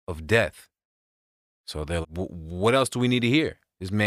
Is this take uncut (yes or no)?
no